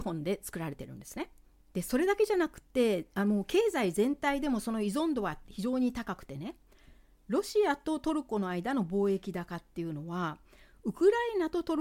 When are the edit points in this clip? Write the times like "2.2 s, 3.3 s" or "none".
1.6 s